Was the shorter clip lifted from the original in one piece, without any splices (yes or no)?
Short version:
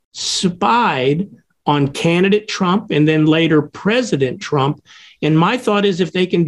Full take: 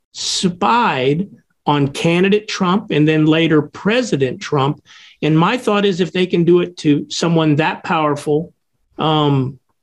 yes